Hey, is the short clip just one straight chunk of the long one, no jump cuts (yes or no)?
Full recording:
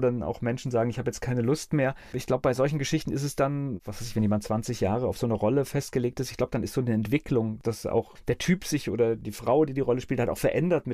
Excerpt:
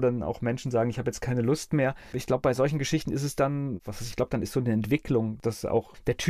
no